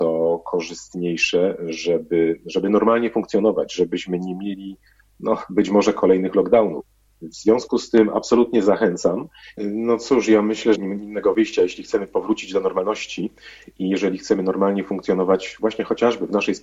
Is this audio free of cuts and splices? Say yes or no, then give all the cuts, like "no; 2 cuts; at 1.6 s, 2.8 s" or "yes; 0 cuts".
no; 2 cuts; at 9.6 s, 10.8 s